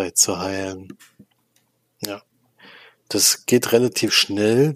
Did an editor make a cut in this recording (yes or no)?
no